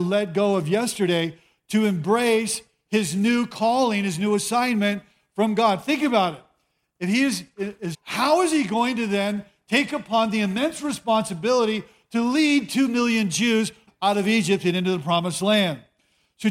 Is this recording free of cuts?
no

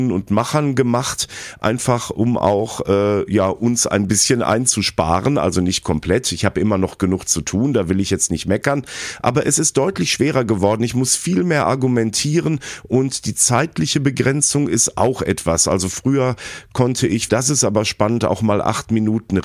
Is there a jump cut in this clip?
yes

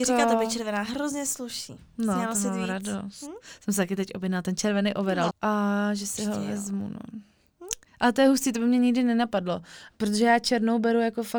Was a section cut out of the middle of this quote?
yes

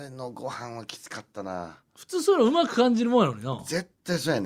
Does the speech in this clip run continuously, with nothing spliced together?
yes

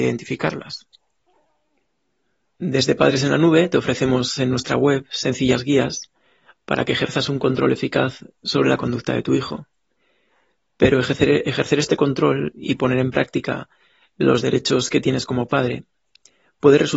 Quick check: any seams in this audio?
yes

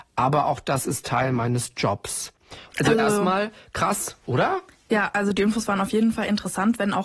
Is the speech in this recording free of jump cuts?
no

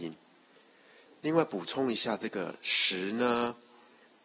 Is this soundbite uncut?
no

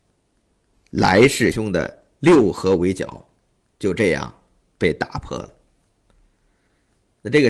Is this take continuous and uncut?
no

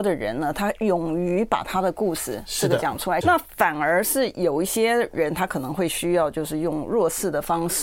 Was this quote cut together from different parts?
yes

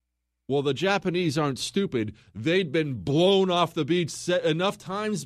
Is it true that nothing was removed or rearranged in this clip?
yes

